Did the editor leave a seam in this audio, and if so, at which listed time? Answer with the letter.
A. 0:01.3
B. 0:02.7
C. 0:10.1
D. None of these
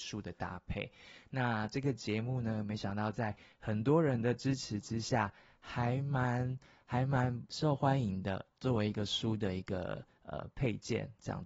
D